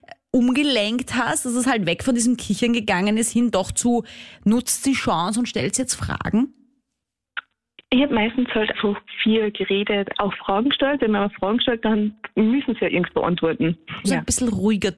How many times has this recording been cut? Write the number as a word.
three